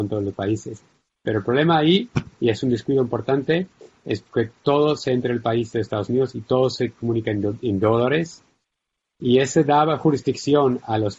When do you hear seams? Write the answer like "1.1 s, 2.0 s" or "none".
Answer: none